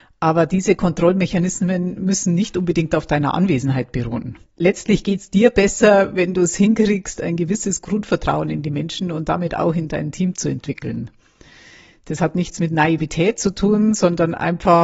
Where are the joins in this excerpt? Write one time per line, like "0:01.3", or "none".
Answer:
0:04.5